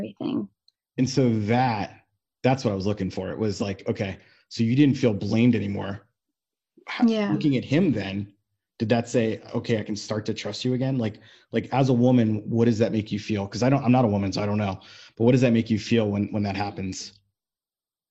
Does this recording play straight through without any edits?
yes; 0 cuts

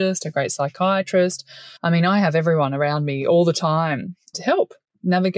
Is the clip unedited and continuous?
no; 2 cuts; at 1.8 s, 4.3 s

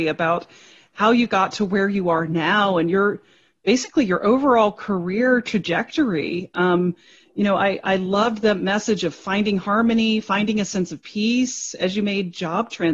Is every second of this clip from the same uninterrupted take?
yes; 0 cuts

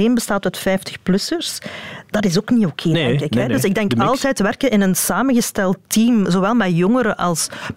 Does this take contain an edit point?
no; 0 cuts

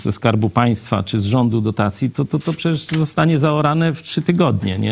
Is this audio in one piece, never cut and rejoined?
no; 1 cut; at 2.1 s

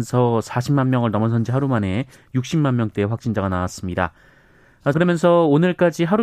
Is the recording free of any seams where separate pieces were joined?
no; 1 cut; at 4.9 s

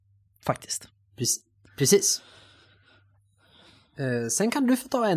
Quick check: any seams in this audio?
no; 0 cuts

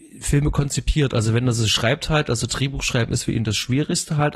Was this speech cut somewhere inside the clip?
no; 0 cuts

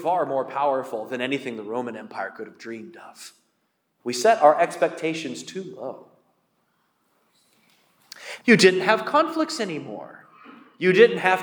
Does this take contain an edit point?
yes; 2 cuts; at 4.0 s, 8.4 s

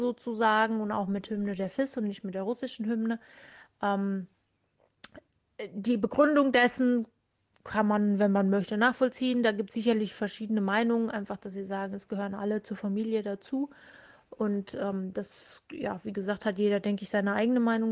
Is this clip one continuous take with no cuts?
yes; 0 cuts

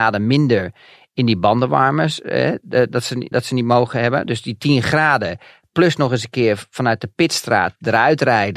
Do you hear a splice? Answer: yes; 1 cut; at 3.3 s

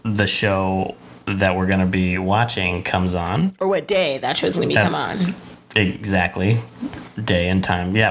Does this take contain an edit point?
no; 0 cuts

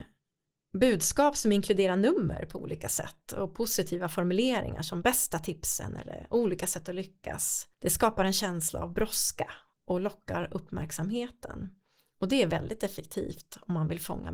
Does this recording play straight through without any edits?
no; 1 cut; at 7.7 s

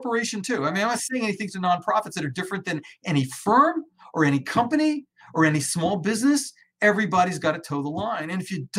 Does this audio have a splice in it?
no; 0 cuts

